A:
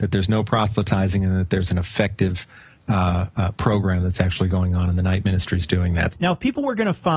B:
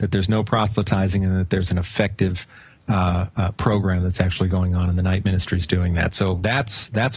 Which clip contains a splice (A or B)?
A